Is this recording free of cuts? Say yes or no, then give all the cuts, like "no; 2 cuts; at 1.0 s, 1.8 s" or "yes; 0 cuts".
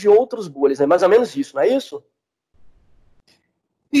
yes; 0 cuts